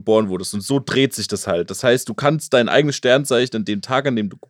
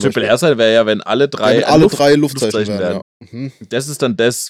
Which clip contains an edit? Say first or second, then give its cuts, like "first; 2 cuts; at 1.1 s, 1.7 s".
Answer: second; 1 cut; at 3.0 s